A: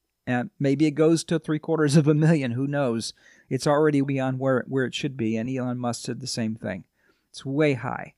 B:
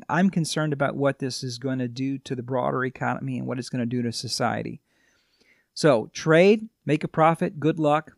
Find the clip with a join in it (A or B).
A